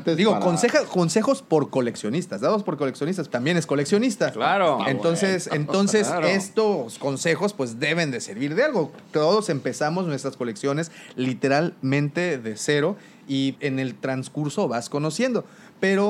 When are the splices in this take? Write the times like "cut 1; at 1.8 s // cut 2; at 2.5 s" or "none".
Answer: cut 1; at 3.3 s // cut 2; at 13.5 s